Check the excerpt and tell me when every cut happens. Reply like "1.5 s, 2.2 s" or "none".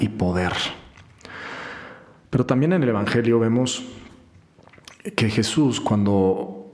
none